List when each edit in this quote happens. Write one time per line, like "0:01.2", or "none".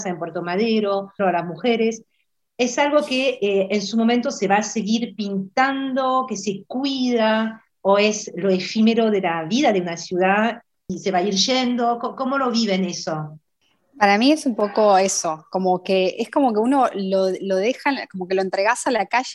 0:01.2